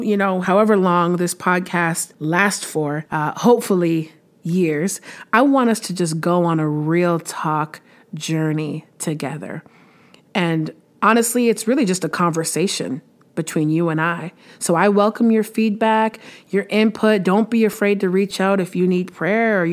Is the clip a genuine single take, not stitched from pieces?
yes; 0 cuts

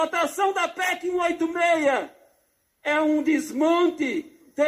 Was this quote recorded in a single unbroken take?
yes; 0 cuts

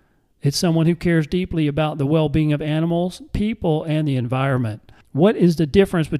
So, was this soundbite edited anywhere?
yes; 1 cut; at 5.0 s

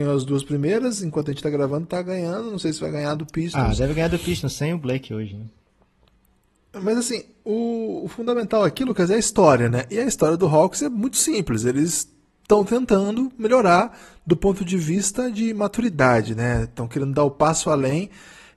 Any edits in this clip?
no; 0 cuts

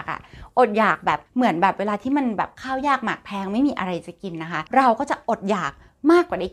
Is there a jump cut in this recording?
yes; 2 cuts; at 1.3 s, 4.7 s

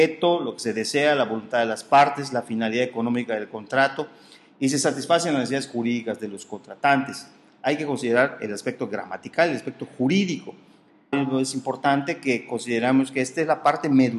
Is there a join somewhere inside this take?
yes; 1 cut; at 11.1 s

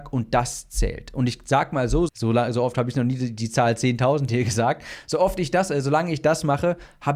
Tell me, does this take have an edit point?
yes; 1 cut; at 2.1 s

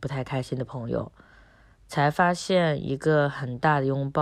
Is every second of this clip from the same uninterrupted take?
yes; 0 cuts

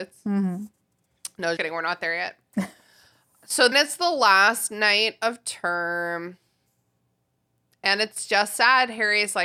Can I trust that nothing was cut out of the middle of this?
no; 2 cuts; at 1.6 s, 3.7 s

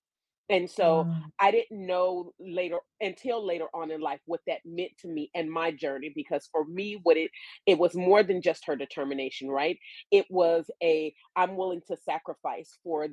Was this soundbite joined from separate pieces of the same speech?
no; 0 cuts

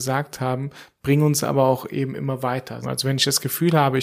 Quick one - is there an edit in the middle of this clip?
yes; 1 cut; at 2.8 s

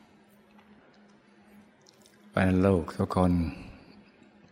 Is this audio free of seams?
yes; 0 cuts

